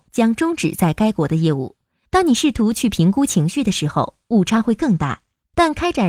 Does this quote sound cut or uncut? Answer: cut